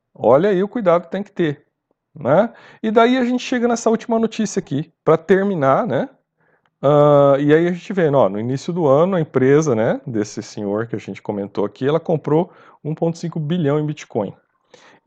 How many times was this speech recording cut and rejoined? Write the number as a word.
one